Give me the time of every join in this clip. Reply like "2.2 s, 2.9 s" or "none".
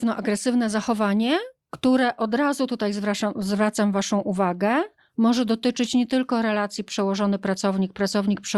none